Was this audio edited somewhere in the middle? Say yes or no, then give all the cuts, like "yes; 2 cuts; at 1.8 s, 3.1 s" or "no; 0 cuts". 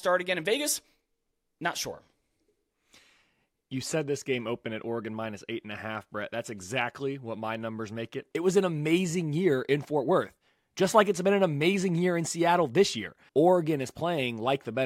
yes; 2 cuts; at 8.3 s, 13.3 s